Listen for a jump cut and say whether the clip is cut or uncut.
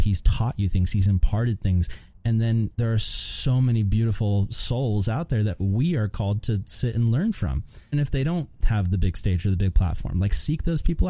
cut